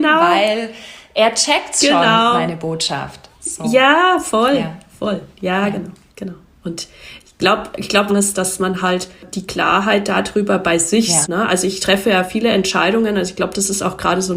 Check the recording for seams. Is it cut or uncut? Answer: cut